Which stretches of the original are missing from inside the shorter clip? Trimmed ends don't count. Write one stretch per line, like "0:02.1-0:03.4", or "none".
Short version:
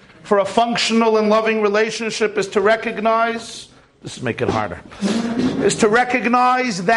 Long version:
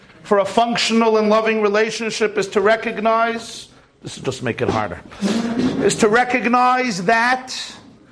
0:04.2-0:04.4